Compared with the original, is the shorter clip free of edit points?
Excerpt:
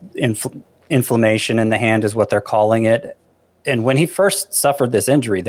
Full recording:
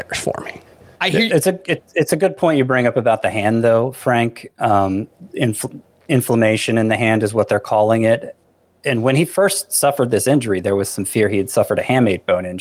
yes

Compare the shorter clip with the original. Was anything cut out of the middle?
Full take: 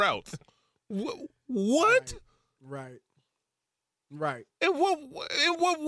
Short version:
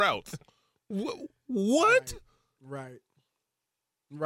no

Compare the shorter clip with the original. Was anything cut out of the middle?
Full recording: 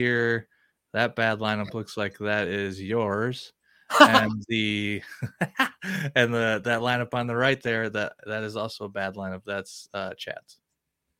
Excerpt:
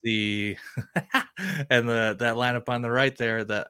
no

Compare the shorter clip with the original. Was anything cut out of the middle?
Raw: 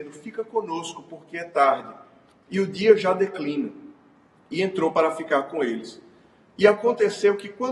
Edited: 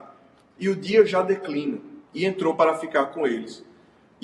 yes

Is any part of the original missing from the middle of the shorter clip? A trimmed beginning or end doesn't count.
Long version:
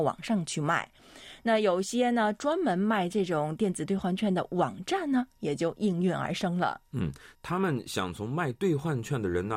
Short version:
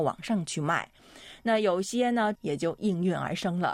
yes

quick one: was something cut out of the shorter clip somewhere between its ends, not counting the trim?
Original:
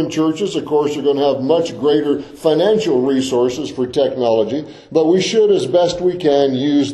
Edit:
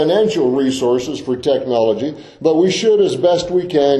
no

